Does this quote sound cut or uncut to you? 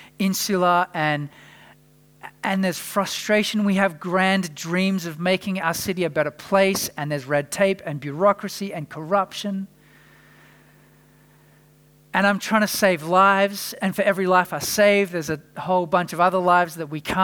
uncut